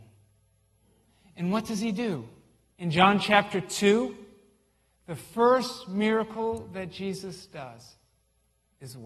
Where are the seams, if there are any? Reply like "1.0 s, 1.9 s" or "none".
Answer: 2.7 s